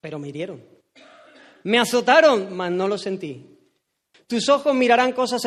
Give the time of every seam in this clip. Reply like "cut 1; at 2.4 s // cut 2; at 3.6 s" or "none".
cut 1; at 4.1 s